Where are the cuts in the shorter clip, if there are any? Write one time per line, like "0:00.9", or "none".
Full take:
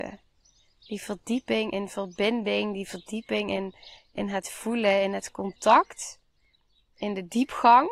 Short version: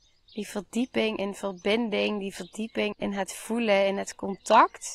0:02.9

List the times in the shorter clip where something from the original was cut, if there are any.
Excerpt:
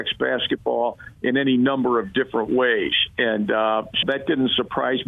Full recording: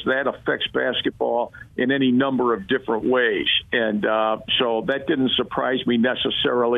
0:04.0

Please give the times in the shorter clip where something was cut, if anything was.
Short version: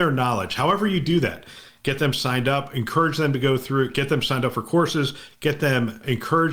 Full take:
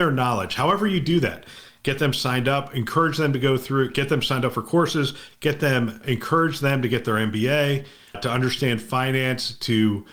none

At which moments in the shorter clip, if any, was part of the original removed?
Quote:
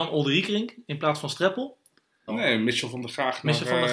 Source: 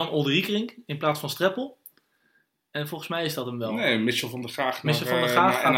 0:02.3

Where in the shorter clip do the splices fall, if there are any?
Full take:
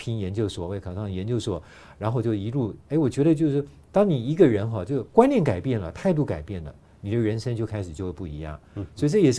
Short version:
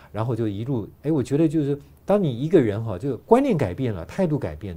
none

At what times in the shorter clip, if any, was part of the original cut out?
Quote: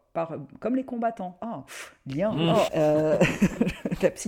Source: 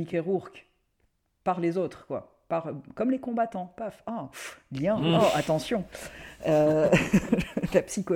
0:01.4
0:02.7

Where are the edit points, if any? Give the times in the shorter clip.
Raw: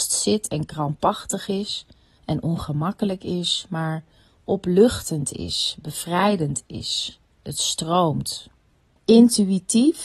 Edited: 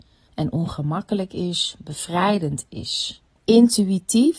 0:01.8
0:03.3

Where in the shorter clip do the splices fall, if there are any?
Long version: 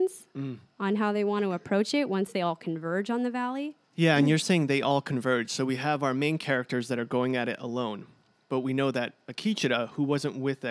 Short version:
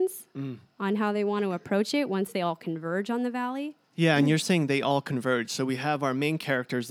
none

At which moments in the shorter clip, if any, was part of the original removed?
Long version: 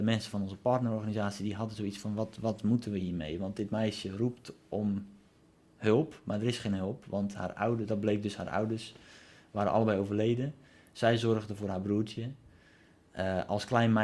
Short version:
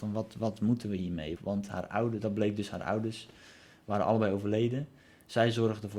0:01.3

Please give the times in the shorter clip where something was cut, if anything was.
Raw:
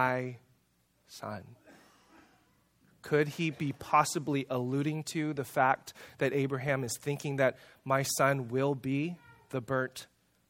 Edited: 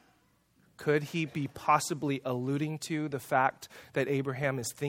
none

